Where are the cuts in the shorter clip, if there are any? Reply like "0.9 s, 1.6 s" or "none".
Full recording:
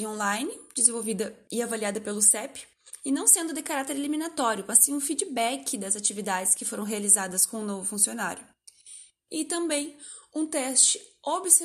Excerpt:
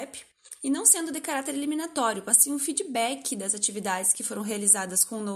none